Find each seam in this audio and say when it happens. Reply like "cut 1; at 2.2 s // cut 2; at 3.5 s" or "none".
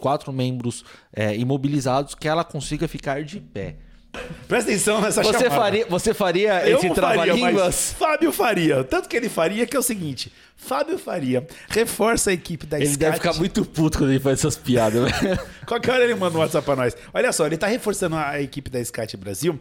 cut 1; at 4.1 s